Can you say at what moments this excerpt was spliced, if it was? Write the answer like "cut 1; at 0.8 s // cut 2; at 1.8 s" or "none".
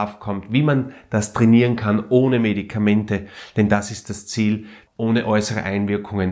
cut 1; at 4.9 s